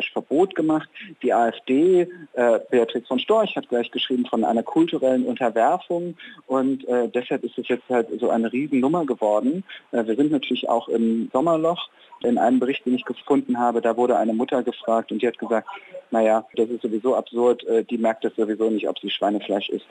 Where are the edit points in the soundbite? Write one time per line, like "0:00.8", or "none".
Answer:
0:12.2
0:16.5